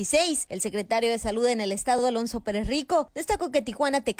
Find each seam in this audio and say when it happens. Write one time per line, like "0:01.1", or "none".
none